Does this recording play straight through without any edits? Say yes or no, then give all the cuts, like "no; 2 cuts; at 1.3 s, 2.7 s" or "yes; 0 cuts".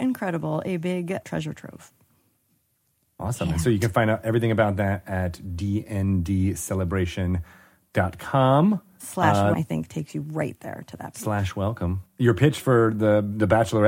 no; 3 cuts; at 1.2 s, 9.5 s, 12.1 s